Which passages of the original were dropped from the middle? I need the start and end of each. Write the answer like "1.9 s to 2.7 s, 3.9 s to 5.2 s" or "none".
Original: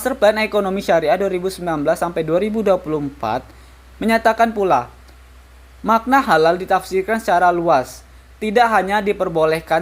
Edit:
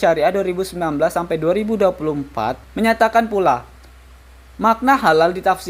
3.5 s to 3.9 s